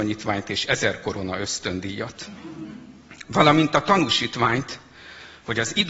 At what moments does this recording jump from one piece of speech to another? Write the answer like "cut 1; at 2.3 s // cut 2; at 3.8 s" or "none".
none